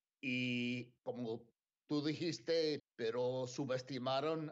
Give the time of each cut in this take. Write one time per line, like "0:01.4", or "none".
0:01.0
0:02.8